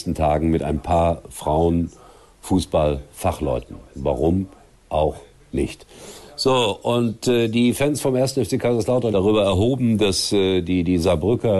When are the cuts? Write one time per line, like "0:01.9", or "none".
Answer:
0:09.1